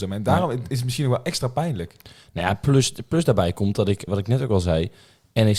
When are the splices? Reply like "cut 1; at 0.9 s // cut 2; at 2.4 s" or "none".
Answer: cut 1; at 4.1 s

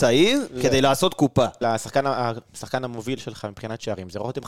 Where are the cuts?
cut 1; at 1.6 s

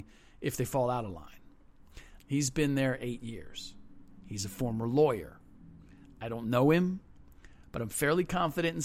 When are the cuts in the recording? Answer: cut 1; at 2.2 s

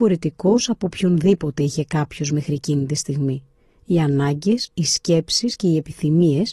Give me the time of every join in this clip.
none

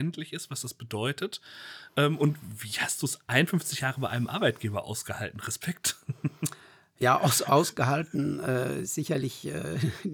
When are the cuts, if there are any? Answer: none

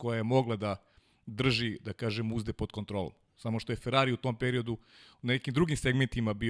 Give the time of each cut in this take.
none

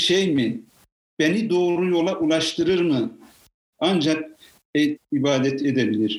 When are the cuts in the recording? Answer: cut 1; at 3.7 s // cut 2; at 5.0 s

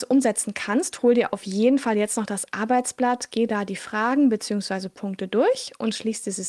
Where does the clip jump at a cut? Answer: none

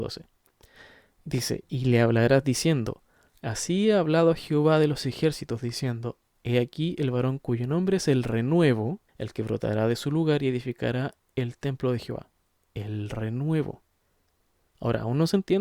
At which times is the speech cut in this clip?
cut 1; at 9.1 s

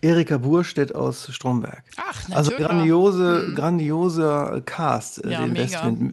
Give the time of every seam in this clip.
cut 1; at 2.6 s

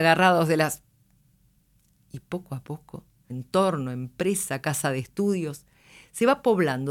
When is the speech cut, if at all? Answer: cut 1; at 3.3 s

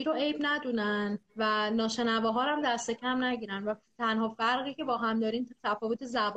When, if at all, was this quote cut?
cut 1; at 1.3 s

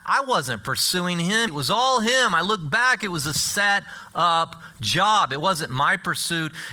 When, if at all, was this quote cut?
cut 1; at 1.5 s

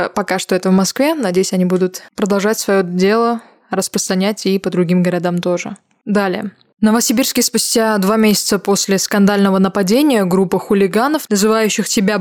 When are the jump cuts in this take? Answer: none

